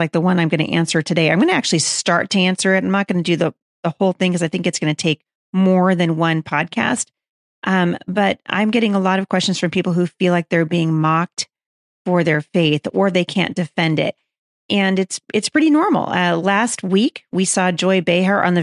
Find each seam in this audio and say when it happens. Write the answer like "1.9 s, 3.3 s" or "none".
none

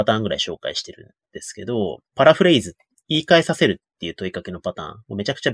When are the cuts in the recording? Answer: 2.1 s

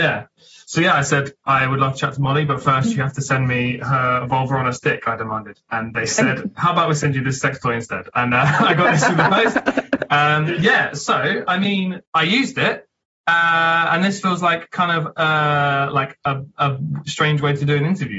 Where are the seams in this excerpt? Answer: 12.0 s

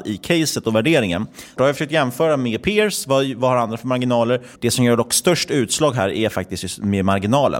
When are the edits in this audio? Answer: 1.6 s, 4.6 s

